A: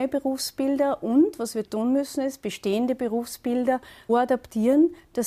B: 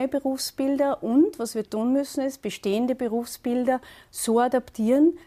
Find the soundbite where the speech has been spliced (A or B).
A